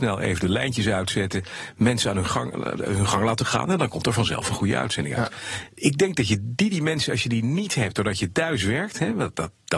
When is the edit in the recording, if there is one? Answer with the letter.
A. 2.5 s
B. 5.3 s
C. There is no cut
C